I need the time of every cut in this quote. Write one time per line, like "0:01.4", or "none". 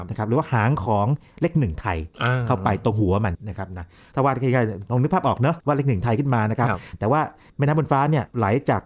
0:03.3